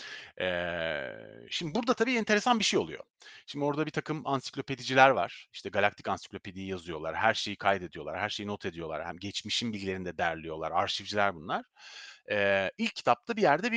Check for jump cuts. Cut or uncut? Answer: uncut